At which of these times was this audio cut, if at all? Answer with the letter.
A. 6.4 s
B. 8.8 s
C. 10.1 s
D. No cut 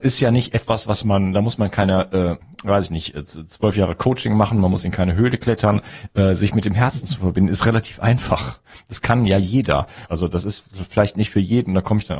C